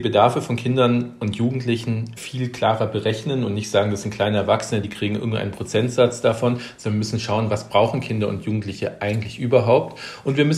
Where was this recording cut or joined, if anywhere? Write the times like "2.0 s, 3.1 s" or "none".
none